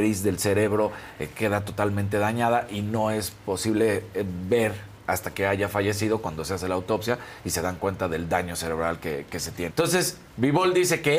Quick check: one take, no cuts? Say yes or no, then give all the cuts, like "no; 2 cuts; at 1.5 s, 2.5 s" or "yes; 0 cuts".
no; 1 cut; at 9.7 s